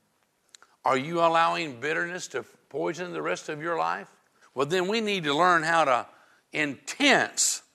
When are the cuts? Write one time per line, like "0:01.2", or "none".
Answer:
0:04.4

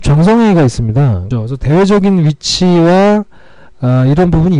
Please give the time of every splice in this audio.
0:01.3

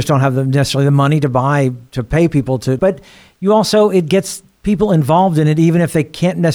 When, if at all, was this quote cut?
0:02.8

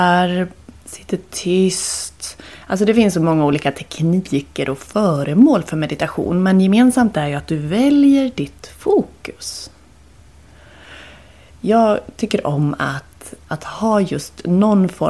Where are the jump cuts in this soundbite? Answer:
none

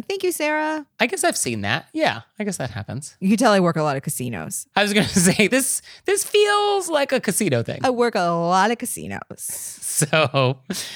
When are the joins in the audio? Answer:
none

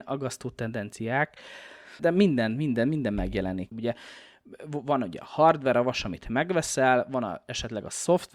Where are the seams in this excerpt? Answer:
0:02.0
0:03.7

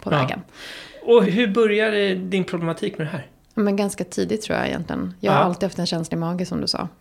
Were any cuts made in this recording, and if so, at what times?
0:01.3

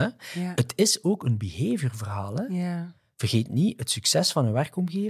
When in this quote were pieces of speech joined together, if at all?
none

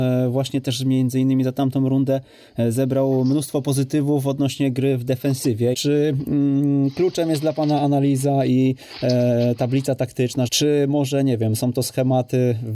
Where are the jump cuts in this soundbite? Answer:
0:05.7
0:10.5

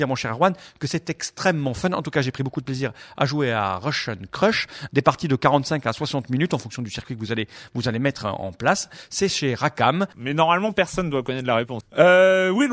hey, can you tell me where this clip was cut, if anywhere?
0:04.9
0:10.1
0:11.8

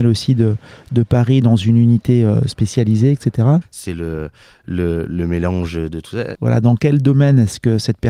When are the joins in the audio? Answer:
0:03.6
0:06.3

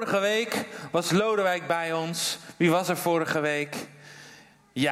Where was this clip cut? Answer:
none

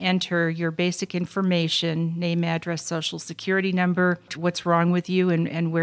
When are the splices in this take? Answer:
0:04.3

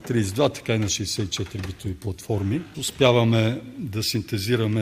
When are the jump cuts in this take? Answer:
0:02.7

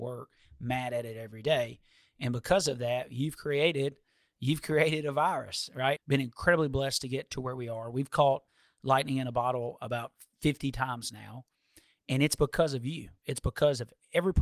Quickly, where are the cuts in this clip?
0:06.0

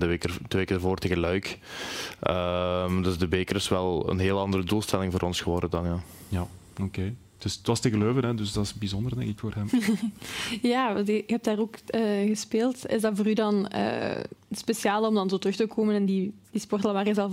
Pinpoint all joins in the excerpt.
none

